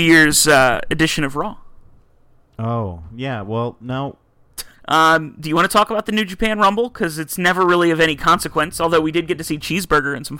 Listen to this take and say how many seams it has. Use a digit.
1